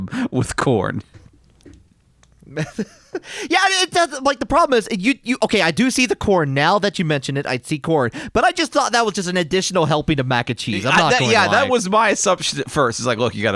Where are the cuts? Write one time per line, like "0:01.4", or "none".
none